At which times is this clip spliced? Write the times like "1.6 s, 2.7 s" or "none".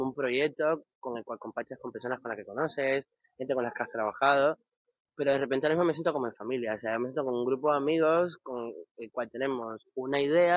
none